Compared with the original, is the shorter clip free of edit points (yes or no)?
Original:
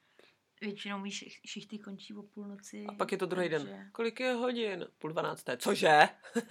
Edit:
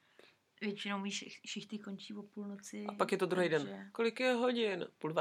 yes